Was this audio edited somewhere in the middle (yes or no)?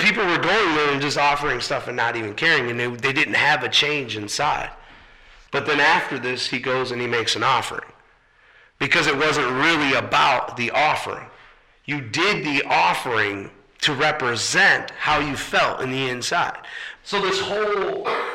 yes